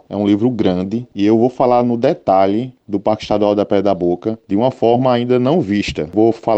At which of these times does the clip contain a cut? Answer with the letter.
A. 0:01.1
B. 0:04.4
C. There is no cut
A